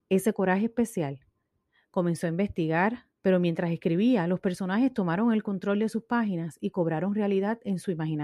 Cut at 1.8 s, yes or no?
no